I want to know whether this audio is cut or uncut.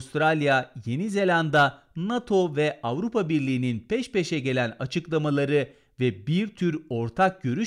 uncut